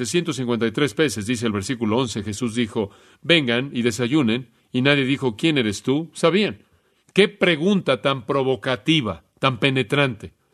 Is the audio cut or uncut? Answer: cut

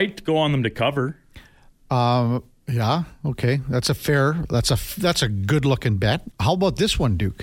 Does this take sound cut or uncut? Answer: cut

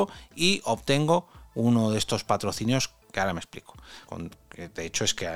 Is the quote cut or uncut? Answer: cut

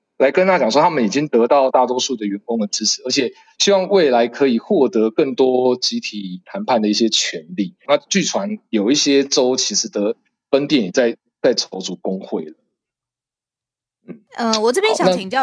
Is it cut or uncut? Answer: cut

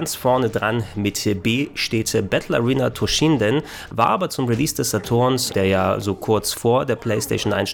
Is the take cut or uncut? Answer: cut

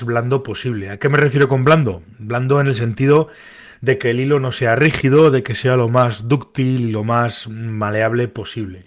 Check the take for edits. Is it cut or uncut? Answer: uncut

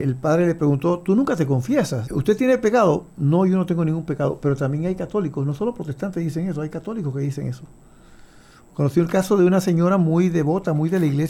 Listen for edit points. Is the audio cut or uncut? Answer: cut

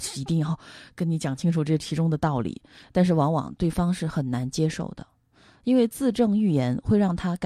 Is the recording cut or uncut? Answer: uncut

